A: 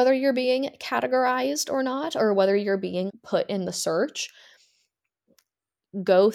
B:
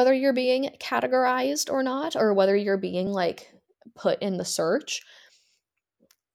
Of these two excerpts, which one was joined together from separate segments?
A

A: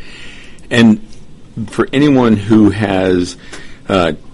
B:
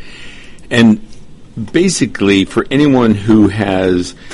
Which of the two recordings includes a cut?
A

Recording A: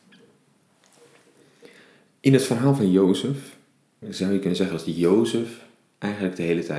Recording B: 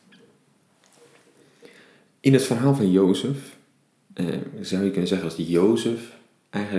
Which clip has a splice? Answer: A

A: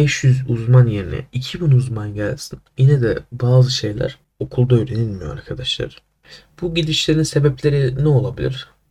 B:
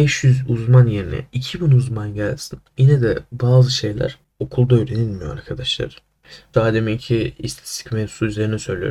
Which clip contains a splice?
B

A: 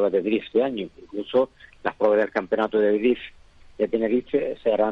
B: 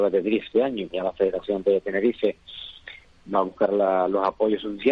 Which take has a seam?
B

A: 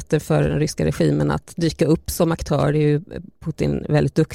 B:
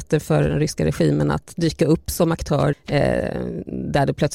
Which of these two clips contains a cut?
B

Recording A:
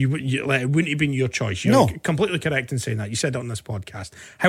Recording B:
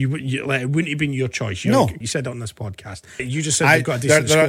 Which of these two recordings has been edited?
B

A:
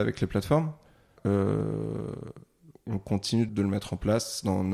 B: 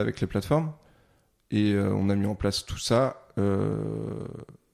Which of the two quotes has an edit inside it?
A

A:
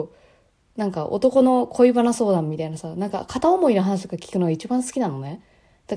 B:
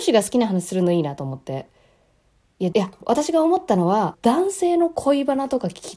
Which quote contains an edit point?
B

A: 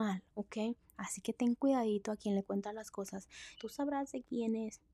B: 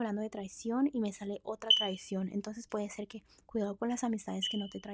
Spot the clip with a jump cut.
A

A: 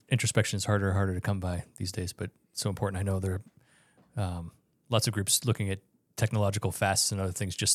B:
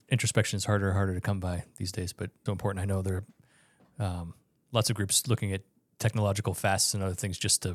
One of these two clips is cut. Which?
B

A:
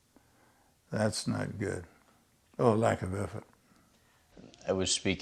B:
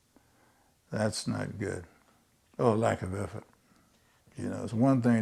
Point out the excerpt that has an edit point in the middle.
B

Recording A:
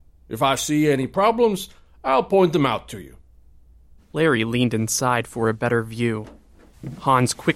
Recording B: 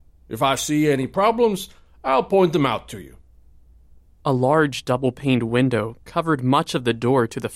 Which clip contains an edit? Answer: A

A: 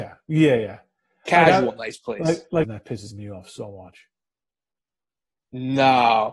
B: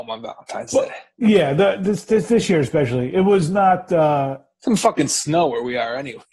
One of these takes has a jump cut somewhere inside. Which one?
A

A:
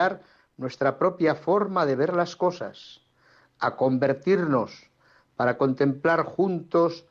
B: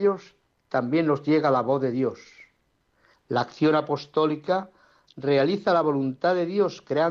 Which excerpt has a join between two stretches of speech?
B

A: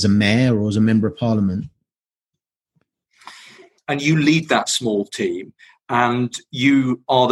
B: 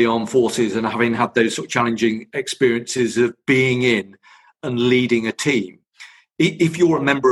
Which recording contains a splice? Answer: A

